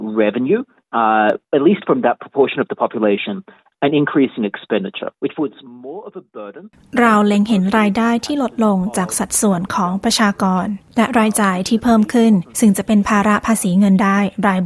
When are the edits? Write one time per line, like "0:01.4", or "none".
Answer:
0:05.2